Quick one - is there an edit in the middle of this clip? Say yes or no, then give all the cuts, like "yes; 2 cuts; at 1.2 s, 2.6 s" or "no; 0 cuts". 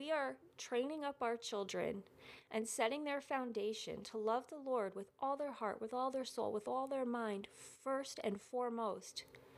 no; 0 cuts